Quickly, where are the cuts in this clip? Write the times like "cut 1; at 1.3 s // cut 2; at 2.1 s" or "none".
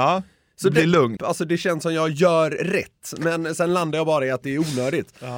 cut 1; at 1.2 s